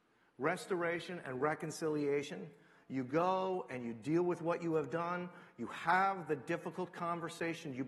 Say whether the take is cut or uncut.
uncut